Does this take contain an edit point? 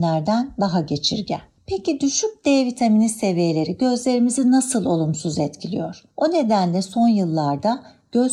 yes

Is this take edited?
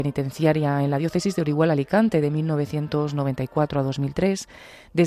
no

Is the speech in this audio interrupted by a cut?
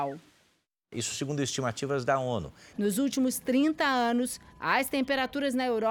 yes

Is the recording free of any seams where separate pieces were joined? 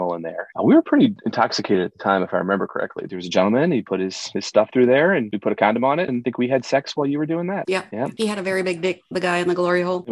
no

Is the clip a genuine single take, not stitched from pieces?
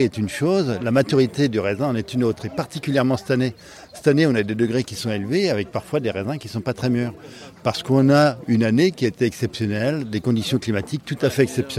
yes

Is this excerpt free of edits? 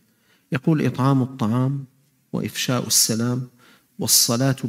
yes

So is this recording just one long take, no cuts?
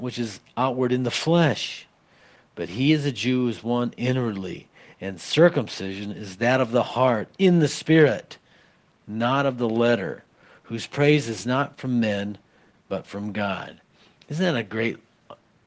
yes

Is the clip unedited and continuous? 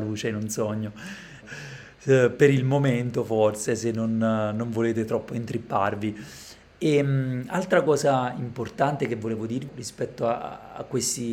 no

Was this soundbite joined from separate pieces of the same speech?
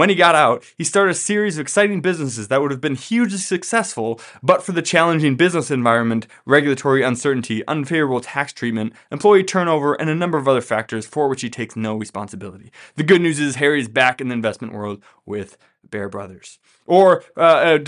no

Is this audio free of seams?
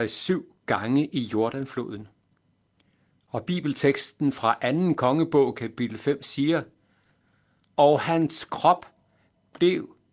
yes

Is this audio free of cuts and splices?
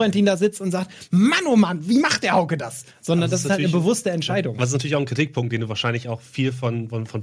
yes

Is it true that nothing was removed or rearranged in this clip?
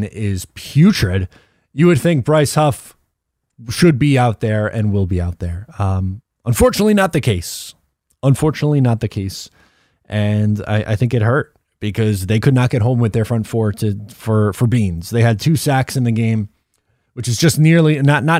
yes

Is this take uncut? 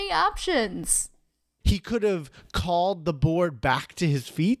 no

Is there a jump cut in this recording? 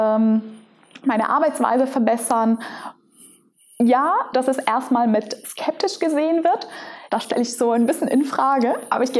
yes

